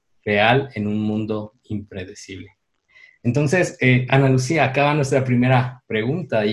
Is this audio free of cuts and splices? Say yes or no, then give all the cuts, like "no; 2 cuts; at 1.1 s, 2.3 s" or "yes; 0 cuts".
yes; 0 cuts